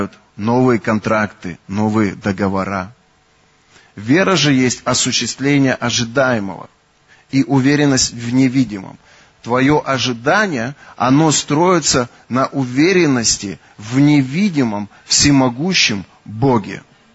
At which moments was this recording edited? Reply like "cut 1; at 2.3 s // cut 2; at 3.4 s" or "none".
none